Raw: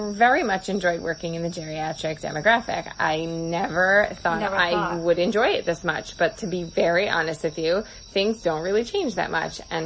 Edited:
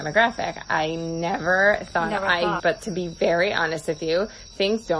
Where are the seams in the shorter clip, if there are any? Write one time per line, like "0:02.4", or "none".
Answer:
0:02.6